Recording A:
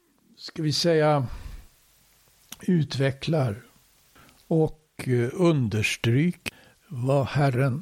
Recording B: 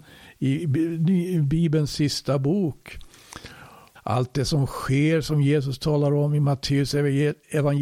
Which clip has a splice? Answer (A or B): B